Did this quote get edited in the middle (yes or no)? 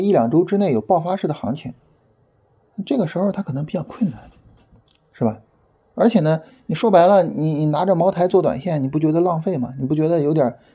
no